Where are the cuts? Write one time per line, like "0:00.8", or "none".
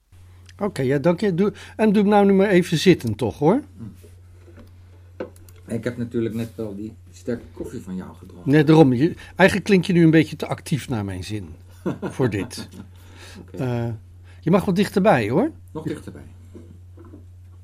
none